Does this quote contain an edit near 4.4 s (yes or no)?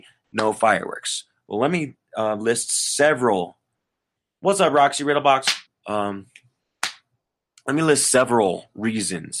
no